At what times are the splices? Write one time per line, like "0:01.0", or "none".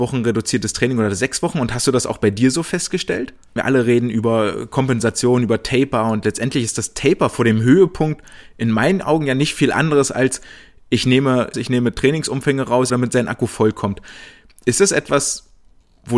0:03.6
0:11.5
0:12.9